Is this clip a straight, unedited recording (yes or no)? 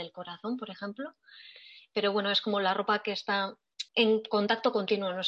no